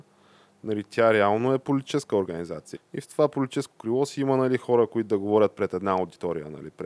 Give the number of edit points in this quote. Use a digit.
1